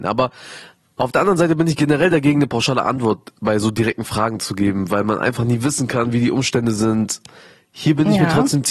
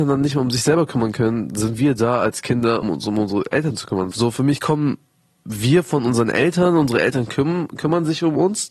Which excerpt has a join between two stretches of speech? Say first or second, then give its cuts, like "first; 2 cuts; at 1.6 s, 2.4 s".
second; 2 cuts; at 2.8 s, 4.1 s